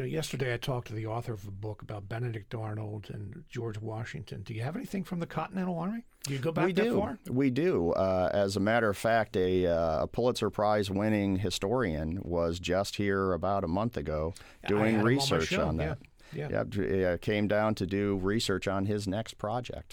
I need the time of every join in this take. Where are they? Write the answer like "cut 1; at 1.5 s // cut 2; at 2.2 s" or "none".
none